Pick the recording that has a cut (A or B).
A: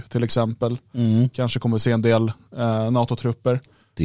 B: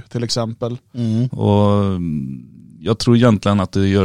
B